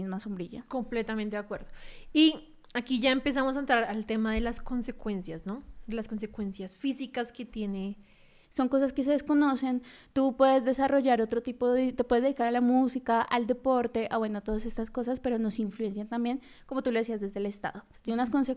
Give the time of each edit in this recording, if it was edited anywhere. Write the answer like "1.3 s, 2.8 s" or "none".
8.4 s